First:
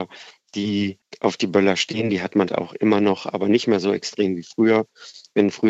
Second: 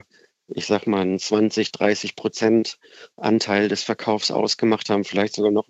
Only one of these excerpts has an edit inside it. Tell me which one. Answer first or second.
first